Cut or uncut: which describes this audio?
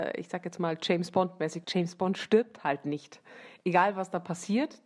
cut